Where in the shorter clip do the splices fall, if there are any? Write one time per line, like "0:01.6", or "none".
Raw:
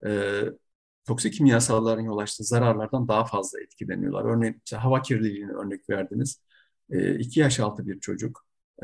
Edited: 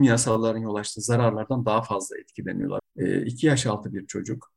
0:02.8